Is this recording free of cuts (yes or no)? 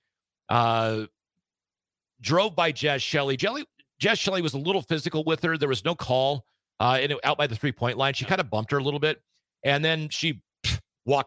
yes